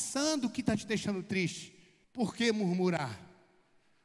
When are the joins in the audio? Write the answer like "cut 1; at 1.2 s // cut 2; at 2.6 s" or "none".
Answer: cut 1; at 2.0 s